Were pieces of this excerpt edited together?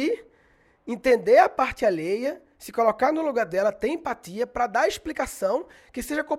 no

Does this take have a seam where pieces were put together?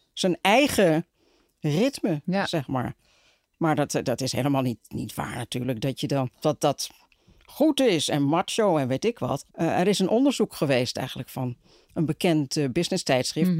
yes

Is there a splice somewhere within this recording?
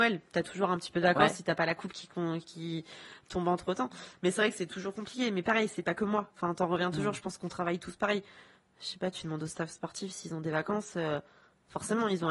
no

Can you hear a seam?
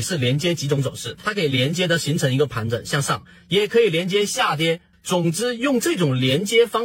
yes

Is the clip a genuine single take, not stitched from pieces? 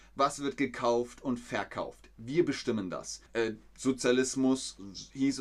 no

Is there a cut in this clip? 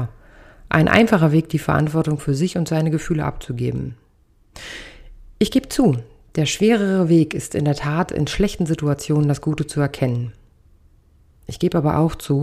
no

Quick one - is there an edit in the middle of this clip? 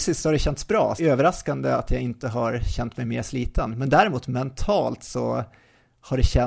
yes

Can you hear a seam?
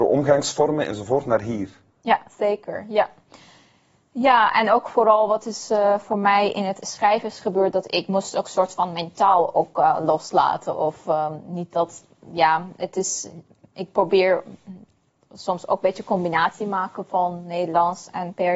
no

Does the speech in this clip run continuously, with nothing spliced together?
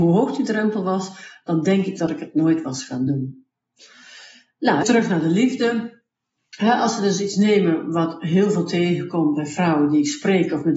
no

